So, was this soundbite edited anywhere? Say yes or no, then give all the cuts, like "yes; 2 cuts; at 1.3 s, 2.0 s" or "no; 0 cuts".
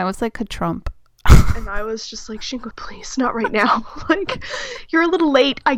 yes; 1 cut; at 2.7 s